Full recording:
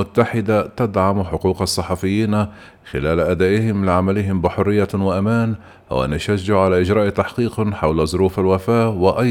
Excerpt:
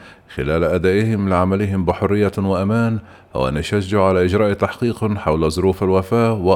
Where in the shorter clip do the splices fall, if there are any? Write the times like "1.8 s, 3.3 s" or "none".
none

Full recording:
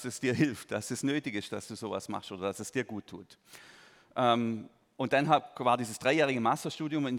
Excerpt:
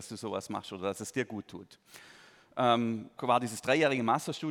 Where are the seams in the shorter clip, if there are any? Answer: 3.2 s

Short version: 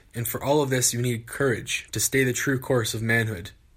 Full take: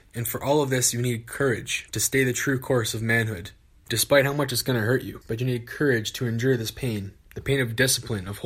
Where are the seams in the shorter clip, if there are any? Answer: none

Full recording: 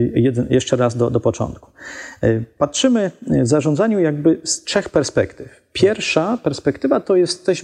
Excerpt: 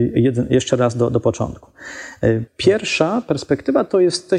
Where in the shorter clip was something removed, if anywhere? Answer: 2.5 s

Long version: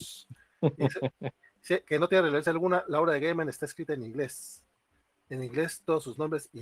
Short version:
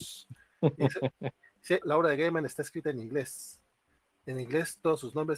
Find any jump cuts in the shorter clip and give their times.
1.8 s

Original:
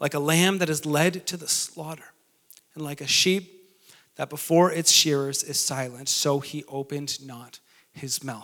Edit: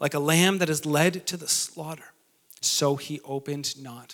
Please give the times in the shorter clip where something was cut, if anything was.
2.6 s

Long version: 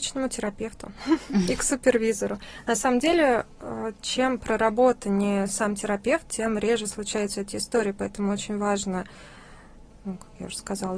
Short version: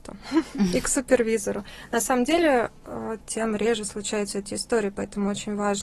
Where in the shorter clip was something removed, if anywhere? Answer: 3.2 s

